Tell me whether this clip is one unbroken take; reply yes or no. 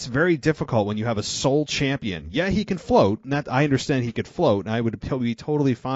yes